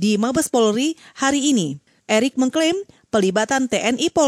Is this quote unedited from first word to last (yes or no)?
no